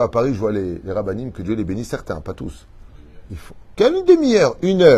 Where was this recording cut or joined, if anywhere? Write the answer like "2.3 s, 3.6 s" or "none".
none